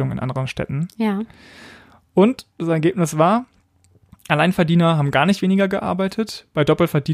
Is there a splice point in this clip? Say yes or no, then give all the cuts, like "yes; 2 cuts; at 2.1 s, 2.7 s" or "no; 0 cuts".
no; 0 cuts